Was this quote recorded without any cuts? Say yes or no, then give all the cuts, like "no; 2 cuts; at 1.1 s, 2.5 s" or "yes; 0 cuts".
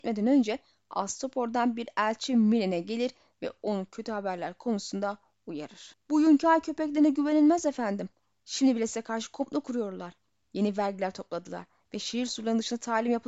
yes; 0 cuts